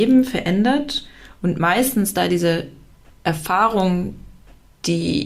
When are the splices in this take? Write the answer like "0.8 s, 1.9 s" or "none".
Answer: none